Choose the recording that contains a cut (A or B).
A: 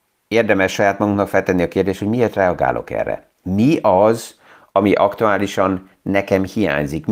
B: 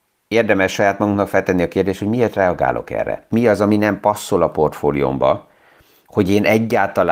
B